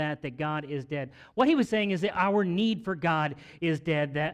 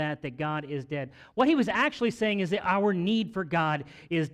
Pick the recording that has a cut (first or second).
first